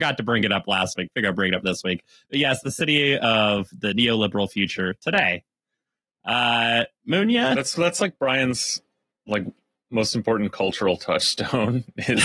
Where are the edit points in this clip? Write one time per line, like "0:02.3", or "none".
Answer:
none